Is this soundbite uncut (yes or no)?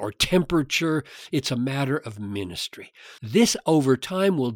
no